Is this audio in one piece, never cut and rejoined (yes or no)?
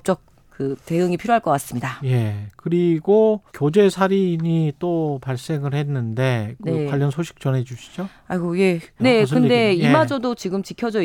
no